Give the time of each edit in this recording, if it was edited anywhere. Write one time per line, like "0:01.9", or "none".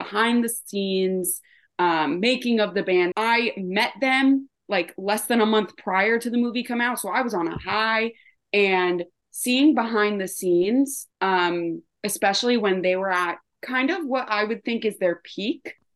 0:03.1
0:11.1